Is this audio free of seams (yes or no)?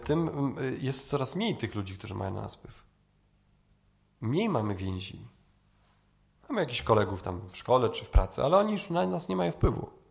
yes